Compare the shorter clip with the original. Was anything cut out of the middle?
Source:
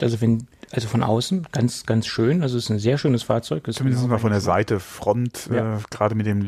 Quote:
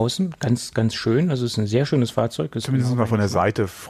no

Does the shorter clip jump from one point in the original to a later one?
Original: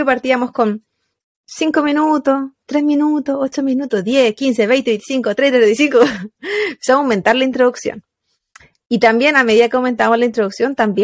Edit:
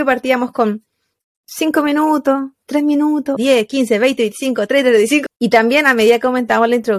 yes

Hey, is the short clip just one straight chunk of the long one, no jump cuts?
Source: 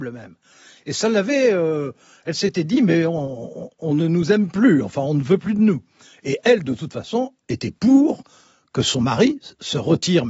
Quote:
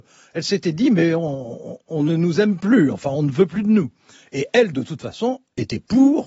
yes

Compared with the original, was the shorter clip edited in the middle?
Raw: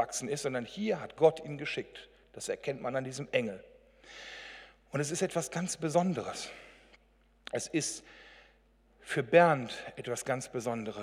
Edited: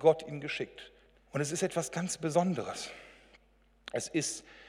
yes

